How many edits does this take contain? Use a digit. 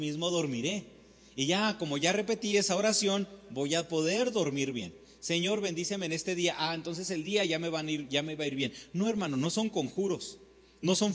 0